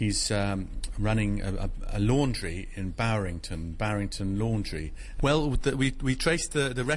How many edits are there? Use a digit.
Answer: 1